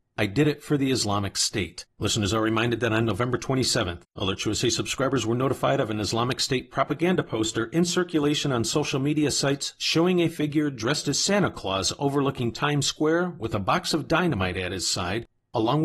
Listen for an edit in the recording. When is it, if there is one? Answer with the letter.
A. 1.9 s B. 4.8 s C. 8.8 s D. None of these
A